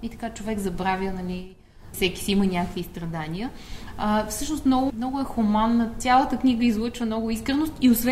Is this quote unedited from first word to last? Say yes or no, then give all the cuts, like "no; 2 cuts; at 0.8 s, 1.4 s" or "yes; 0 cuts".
no; 2 cuts; at 1.9 s, 4.9 s